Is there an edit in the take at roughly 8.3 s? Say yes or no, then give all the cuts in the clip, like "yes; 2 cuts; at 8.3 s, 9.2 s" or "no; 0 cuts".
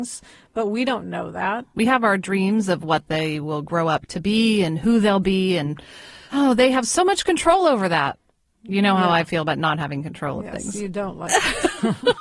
no; 0 cuts